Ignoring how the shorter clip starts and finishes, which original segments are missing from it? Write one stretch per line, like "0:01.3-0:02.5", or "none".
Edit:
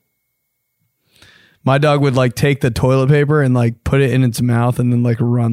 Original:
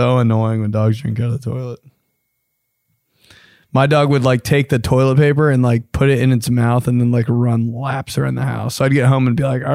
none

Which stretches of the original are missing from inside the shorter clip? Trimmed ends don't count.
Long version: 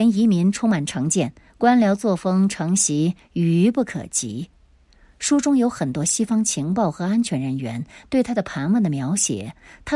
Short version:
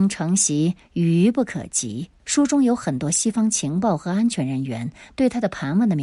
0:04.6-0:05.1

